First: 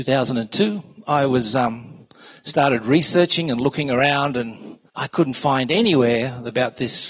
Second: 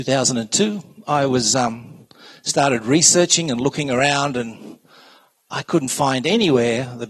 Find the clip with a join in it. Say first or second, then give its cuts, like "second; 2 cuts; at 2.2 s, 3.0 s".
first; 1 cut; at 4.9 s